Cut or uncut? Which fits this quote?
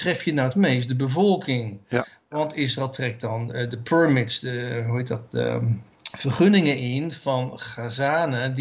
cut